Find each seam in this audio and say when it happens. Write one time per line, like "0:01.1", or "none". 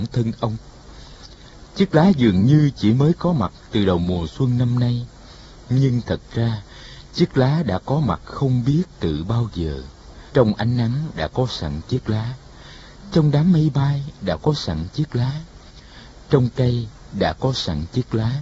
0:01.7
0:10.3